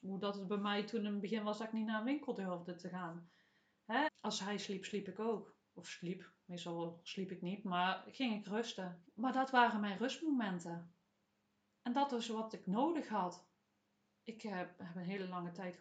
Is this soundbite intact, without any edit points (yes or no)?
no